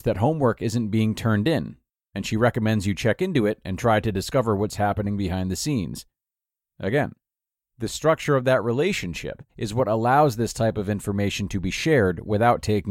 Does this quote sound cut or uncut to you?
cut